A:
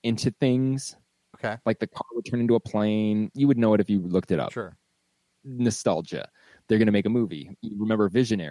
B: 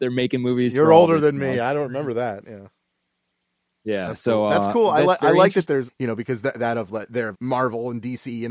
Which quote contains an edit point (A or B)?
B